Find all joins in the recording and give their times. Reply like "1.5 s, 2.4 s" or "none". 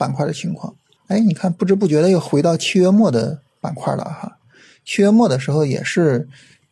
1.0 s